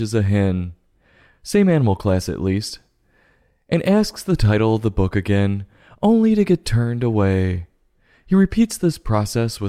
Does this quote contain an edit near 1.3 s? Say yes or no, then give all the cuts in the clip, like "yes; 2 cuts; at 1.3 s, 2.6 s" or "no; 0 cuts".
no; 0 cuts